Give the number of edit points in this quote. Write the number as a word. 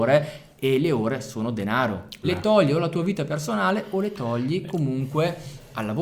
one